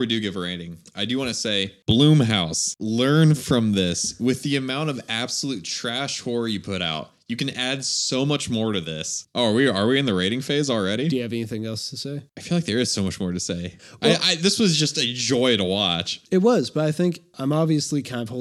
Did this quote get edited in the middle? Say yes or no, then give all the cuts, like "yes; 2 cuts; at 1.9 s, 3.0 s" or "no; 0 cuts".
yes; 1 cut; at 9.3 s